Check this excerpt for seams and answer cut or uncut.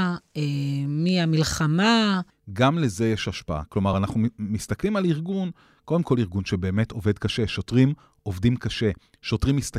uncut